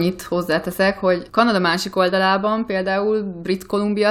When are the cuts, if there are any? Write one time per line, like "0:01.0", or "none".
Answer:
0:01.3